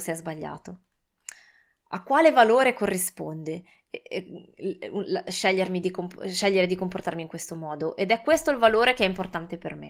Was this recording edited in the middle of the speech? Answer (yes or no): no